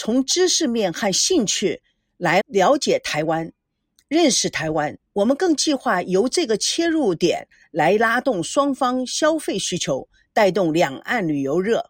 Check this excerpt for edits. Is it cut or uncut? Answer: cut